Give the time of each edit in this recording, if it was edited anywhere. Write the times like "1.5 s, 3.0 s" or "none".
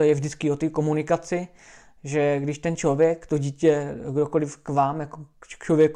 none